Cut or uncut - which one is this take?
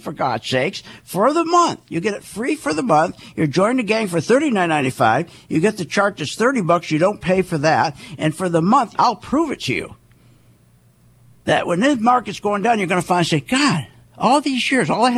cut